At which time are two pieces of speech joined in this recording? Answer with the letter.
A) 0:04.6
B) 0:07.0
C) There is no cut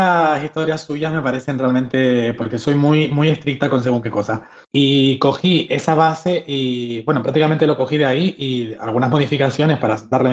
A